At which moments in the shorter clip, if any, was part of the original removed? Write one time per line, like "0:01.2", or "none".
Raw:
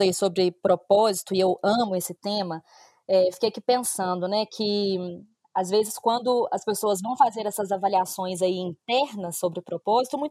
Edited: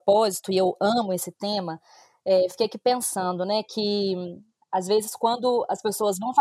none